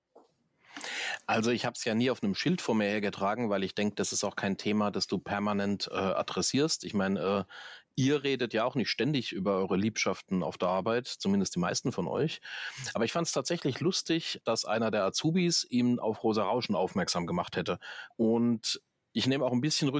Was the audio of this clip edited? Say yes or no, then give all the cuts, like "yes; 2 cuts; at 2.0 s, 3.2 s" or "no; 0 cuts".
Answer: yes; 2 cuts; at 14.4 s, 18.1 s